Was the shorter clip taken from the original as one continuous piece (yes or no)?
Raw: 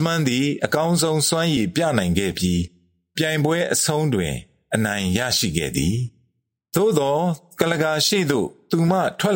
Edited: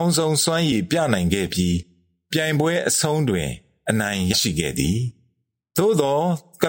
no